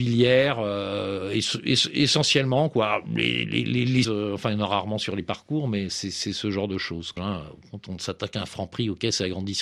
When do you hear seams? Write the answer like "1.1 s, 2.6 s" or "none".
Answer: 4.0 s, 7.2 s